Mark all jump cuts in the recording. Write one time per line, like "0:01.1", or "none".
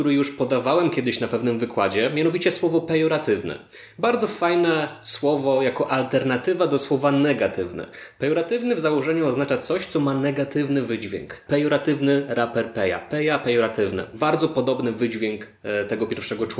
0:11.5